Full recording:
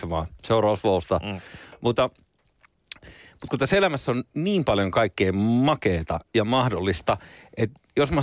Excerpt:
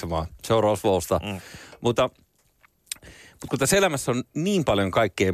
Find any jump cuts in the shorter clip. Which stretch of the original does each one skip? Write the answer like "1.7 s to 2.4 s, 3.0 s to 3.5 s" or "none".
none